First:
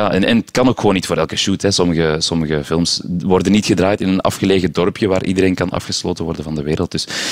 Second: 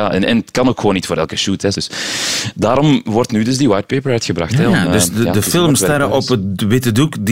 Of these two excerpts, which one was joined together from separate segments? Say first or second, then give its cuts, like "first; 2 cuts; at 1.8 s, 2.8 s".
second; 1 cut; at 1.7 s